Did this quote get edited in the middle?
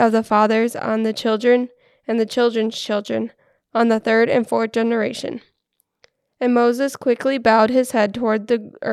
no; 0 cuts

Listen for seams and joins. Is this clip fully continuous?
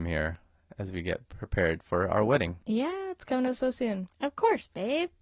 no; 1 cut; at 4.1 s

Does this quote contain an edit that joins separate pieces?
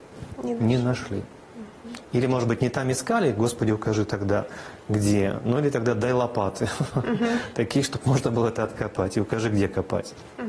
no; 0 cuts

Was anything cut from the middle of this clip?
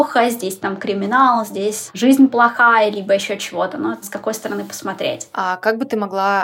yes; 1 cut; at 4.0 s

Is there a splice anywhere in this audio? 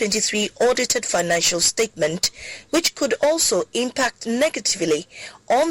no; 0 cuts

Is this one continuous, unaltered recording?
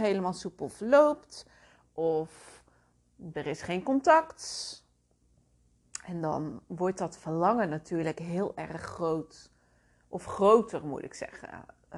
yes; 0 cuts

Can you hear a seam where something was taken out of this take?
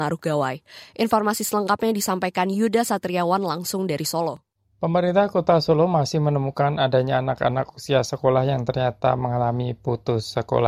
no; 0 cuts

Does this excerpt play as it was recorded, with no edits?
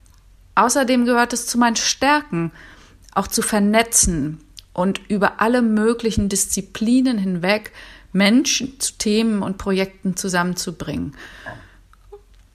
yes; 0 cuts

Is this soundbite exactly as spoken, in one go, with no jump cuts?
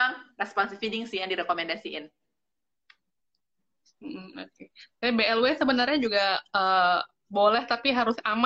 yes; 0 cuts

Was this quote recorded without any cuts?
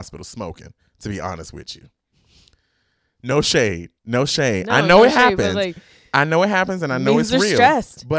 no; 1 cut; at 4.0 s

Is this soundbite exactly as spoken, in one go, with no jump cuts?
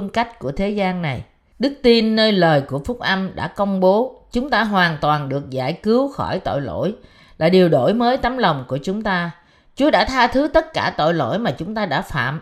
no; 1 cut; at 1.5 s

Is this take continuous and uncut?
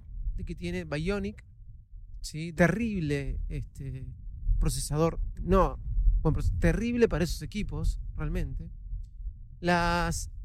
no; 2 cuts; at 2.6 s, 5.4 s

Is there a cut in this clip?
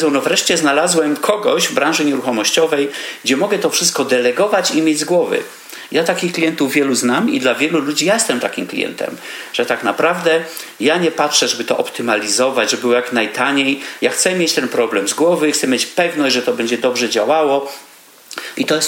no; 0 cuts

